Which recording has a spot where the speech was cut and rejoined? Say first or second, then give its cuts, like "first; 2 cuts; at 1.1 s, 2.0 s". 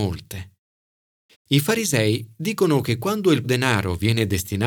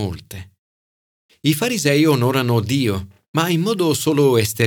first; 2 cuts; at 1.3 s, 3.4 s